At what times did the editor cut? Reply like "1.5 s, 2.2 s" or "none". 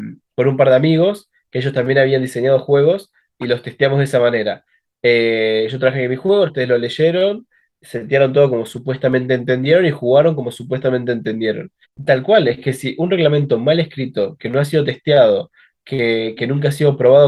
6.5 s, 11.8 s